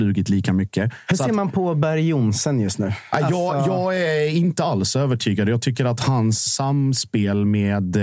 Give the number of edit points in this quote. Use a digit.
1